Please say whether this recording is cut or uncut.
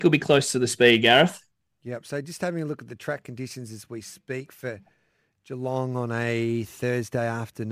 uncut